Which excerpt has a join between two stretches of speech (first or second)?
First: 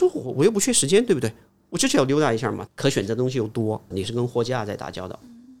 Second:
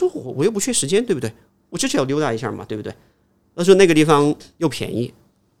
first